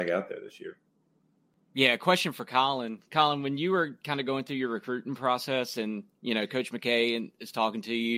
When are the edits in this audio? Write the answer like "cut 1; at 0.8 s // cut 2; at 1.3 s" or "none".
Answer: none